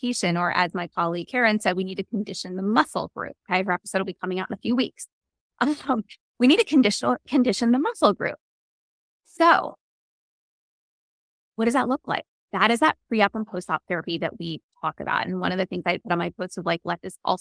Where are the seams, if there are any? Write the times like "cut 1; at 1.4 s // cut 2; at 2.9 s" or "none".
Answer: none

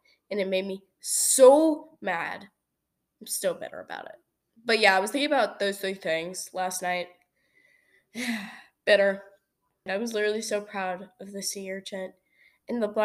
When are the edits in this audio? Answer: cut 1; at 9.9 s

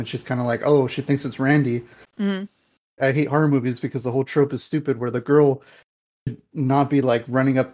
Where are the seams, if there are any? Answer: cut 1; at 3.0 s

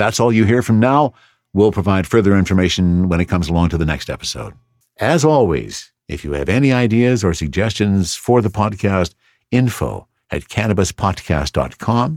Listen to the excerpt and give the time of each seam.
none

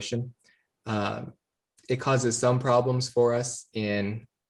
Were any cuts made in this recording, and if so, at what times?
none

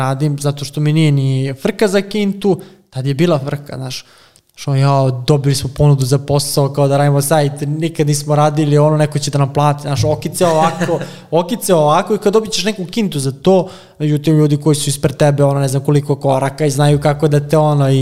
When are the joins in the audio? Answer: none

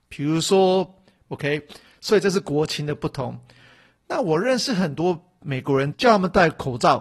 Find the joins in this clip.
cut 1; at 1.3 s // cut 2; at 5.9 s

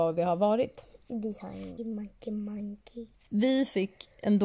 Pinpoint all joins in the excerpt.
cut 1; at 1.8 s // cut 2; at 3.1 s

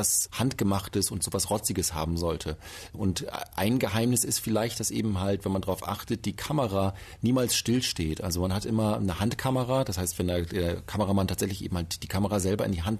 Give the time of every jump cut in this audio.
none

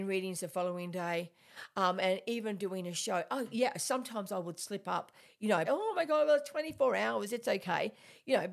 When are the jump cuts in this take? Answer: cut 1; at 5.7 s

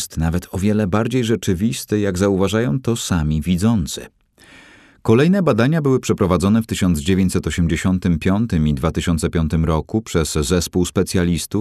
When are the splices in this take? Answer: none

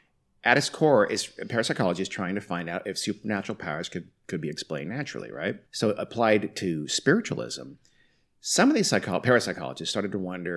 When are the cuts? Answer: cut 1; at 5.7 s

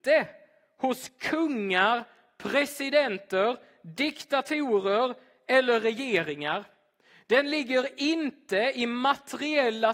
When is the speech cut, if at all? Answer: none

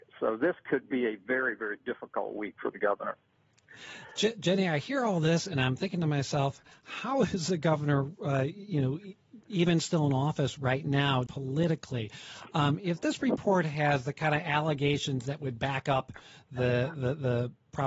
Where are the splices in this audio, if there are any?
cut 1; at 11.3 s

